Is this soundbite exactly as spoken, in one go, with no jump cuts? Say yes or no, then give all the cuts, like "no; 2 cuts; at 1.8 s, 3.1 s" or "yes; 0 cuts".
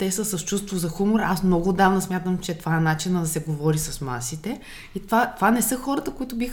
yes; 0 cuts